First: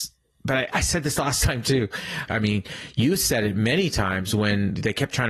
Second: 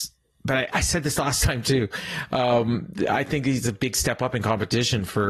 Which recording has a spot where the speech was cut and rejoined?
first; 1 cut; at 2.3 s

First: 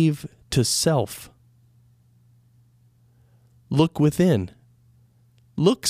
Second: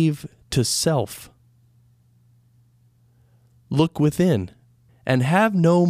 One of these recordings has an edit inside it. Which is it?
second; 1 cut; at 4.9 s

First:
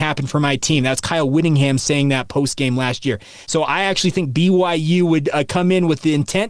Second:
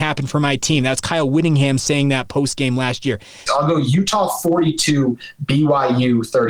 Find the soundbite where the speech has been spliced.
second; 1 cut; at 3.5 s

